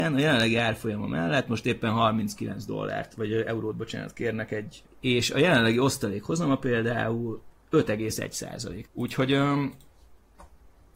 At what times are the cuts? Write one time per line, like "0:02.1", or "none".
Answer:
0:04.9
0:08.8